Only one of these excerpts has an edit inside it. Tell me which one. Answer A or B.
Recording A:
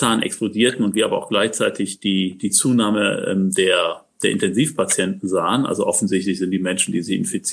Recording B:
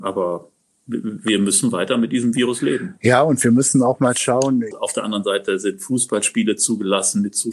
B